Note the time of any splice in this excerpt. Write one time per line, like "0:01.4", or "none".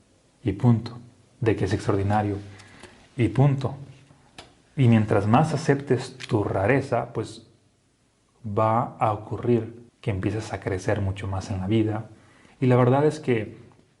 0:09.9
0:12.5